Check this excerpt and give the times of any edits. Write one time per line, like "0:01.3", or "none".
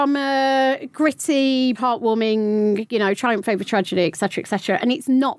0:01.7